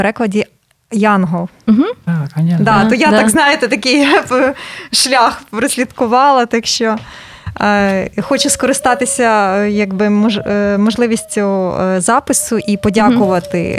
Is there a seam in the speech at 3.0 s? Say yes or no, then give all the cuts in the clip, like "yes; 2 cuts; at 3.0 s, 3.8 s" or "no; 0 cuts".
no; 0 cuts